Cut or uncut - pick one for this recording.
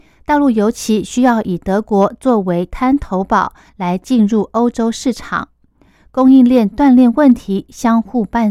cut